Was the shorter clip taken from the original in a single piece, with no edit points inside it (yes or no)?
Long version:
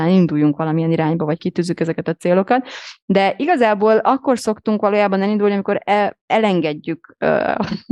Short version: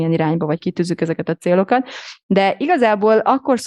yes